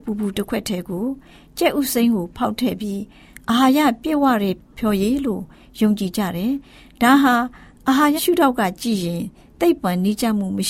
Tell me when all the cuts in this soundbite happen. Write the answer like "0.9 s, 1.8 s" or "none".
8.2 s